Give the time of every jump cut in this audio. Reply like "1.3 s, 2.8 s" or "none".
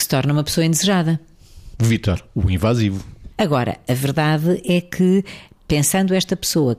3.3 s